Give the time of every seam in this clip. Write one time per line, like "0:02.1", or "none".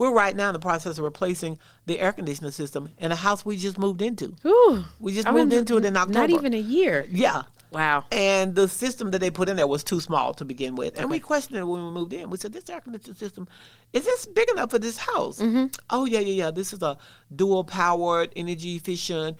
none